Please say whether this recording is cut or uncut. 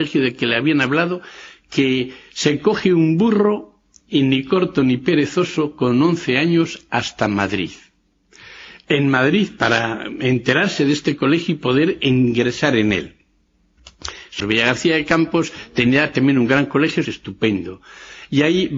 cut